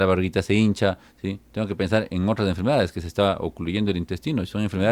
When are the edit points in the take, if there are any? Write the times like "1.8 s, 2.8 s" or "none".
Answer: none